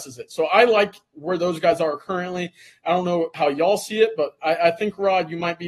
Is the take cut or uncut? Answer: uncut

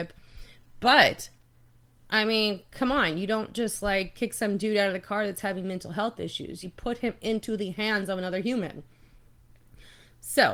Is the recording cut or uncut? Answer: uncut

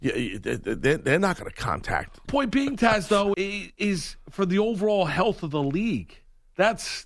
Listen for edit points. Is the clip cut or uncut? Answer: cut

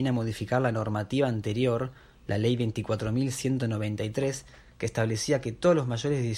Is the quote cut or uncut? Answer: uncut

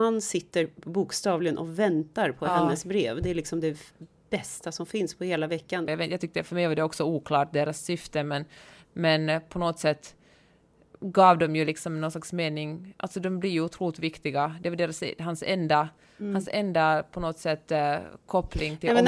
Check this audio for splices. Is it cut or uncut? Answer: cut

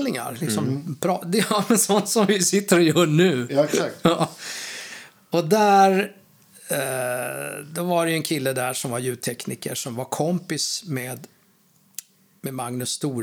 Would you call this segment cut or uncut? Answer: uncut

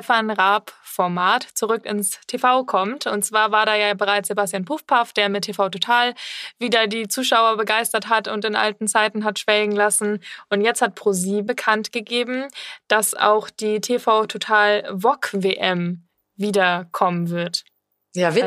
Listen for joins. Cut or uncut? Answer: cut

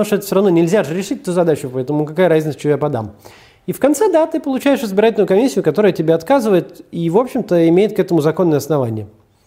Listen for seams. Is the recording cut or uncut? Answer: uncut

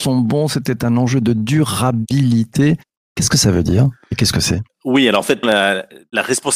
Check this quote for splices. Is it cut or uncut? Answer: cut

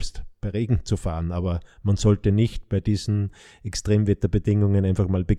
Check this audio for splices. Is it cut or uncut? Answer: uncut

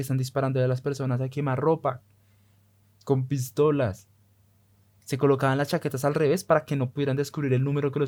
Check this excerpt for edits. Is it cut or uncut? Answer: uncut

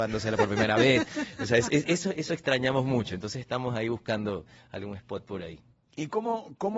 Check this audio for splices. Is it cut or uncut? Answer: uncut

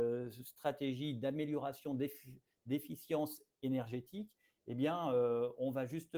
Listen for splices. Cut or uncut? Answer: uncut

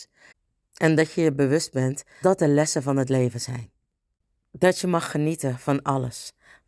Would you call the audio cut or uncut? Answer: cut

